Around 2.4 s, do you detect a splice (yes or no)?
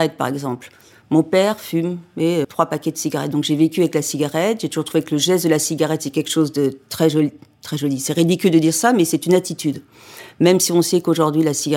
yes